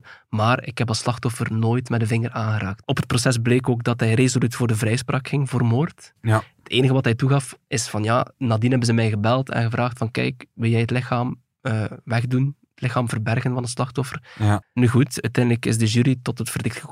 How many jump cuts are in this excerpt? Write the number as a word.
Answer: two